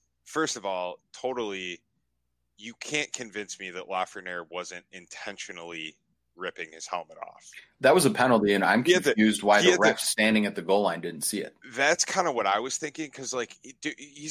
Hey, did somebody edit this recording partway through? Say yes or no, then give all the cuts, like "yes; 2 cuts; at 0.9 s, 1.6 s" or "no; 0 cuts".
no; 0 cuts